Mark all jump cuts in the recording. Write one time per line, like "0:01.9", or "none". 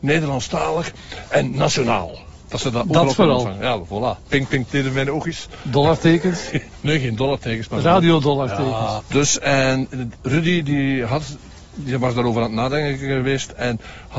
0:04.7
0:09.0